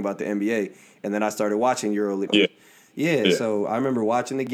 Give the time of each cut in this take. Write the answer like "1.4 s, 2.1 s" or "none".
2.3 s